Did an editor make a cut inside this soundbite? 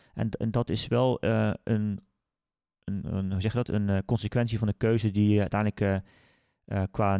no; 0 cuts

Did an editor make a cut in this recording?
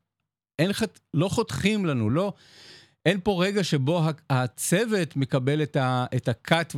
no; 0 cuts

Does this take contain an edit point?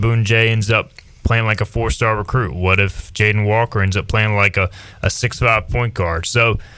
no; 0 cuts

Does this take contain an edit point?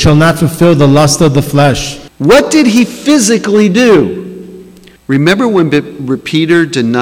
yes; 2 cuts; at 2.1 s, 5.0 s

